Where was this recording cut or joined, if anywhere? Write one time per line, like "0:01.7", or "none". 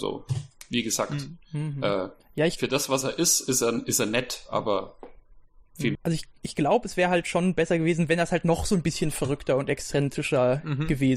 0:05.9